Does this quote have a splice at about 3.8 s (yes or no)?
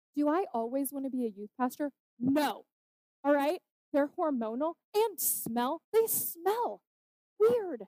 yes